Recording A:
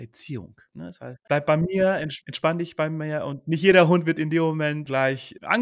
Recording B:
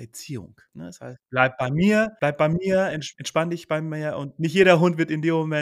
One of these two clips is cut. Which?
A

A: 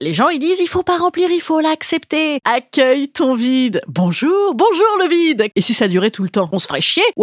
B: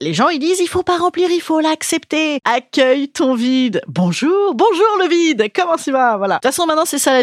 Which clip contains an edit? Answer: A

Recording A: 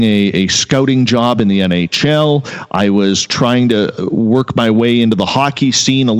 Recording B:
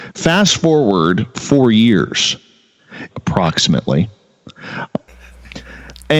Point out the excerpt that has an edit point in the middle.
B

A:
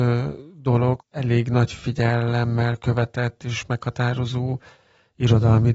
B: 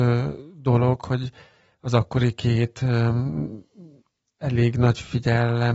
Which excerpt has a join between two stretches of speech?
A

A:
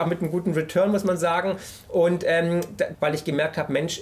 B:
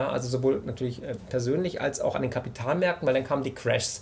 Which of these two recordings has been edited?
A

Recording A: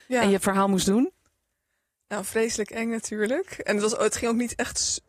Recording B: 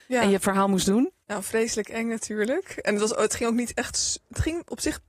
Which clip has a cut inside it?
B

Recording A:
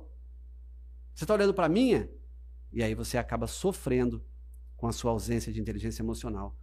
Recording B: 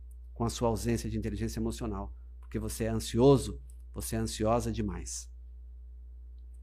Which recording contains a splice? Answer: A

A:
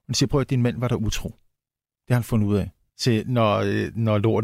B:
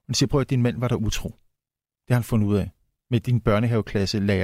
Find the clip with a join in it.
A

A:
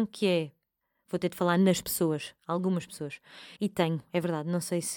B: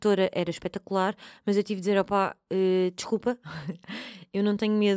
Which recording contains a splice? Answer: A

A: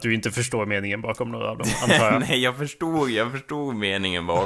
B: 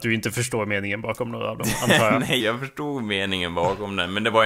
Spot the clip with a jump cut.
B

